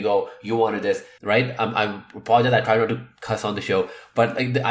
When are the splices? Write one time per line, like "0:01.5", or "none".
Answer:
0:01.2